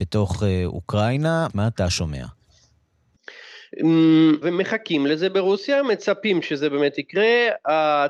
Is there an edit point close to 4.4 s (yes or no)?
yes